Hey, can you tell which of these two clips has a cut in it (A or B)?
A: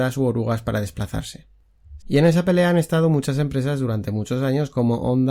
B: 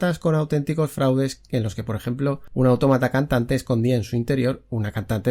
A